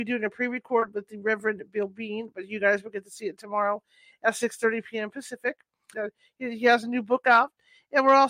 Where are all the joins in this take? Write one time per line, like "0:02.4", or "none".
0:05.9